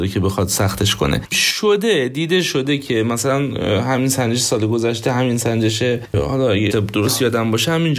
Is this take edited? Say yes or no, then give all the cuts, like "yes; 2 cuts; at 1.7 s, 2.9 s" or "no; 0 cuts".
yes; 1 cut; at 6.7 s